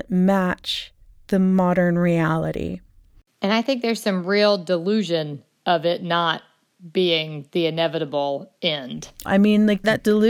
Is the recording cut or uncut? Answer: cut